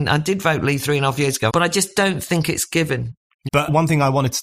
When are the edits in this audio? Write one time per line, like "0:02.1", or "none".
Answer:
0:01.5
0:03.5